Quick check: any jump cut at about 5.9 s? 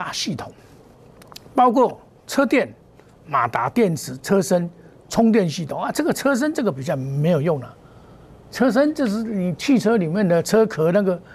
no; 0 cuts

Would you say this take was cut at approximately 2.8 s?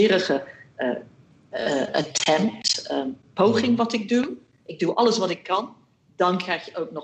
no; 0 cuts

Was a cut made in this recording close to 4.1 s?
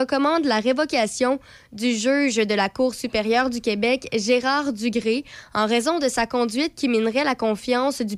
no; 0 cuts

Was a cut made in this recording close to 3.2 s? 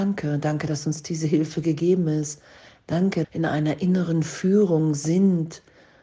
yes; 1 cut; at 3.2 s

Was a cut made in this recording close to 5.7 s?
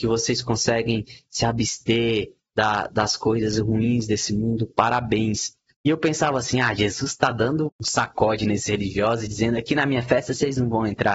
yes; 2 cuts; at 5.7 s, 7.7 s

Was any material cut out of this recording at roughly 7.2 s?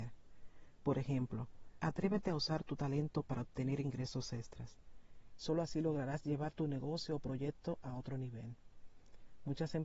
no; 2 cuts; at 1.8 s, 5.3 s

